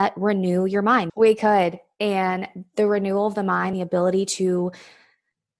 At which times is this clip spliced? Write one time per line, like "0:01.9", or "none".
0:01.1
0:03.7